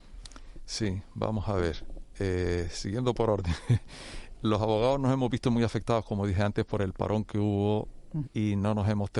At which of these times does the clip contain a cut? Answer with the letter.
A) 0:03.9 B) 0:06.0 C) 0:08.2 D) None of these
C